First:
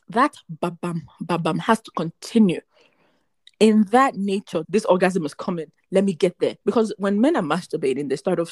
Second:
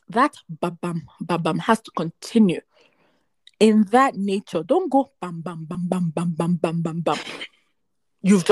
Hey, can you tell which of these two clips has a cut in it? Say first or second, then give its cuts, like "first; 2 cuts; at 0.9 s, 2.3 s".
first; 2 cuts; at 4.6 s, 6.6 s